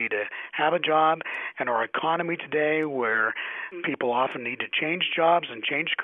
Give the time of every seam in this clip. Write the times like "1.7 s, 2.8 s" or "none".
none